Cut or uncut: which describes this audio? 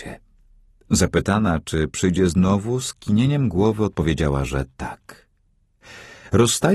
uncut